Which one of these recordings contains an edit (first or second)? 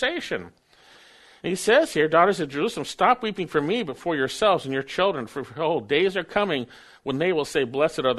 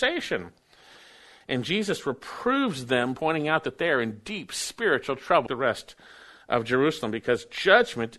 second